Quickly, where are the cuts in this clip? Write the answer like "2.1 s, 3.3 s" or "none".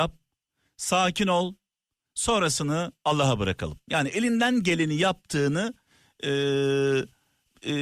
none